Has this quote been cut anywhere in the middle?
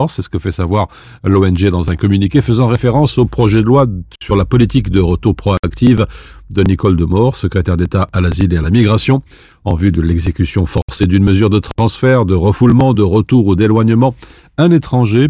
no; 0 cuts

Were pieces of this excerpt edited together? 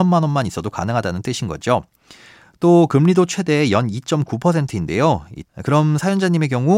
yes; 1 cut; at 5.4 s

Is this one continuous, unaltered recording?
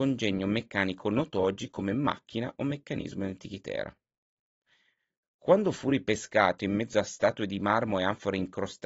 yes; 0 cuts

